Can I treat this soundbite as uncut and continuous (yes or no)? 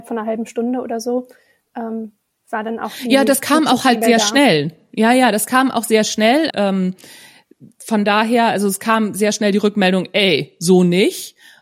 no